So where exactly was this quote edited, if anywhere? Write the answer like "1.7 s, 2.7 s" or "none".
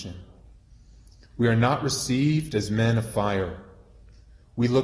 none